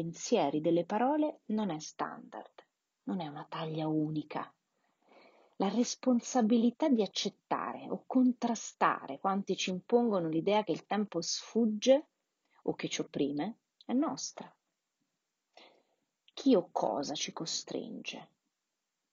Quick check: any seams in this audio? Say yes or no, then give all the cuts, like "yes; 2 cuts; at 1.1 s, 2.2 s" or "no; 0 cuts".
no; 0 cuts